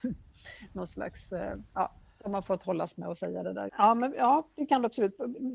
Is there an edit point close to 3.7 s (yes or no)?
yes